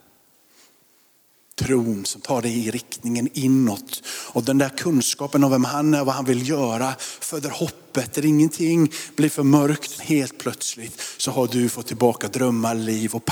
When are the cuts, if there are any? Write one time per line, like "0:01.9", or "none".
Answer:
0:10.0

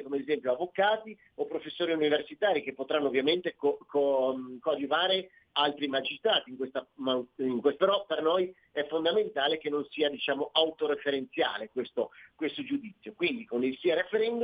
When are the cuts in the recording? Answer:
0:05.5
0:07.8

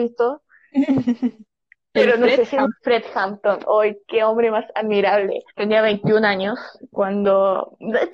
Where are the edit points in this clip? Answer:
0:02.7
0:05.5

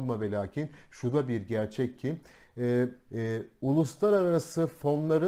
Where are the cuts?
0:03.1

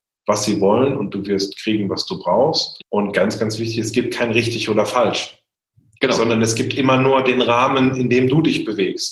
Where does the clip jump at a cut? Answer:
0:02.8

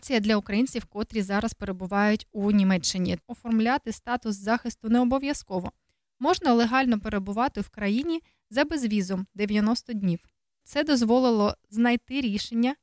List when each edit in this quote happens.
0:03.2
0:10.6

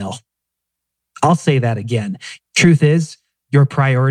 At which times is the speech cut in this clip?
0:02.4

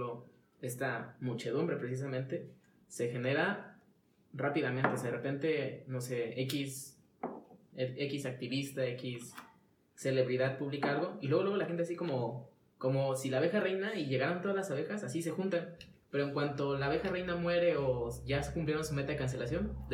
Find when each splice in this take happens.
none

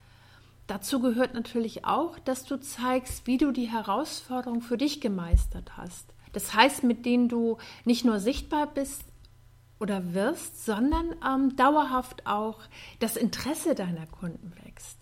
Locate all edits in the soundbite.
0:06.2

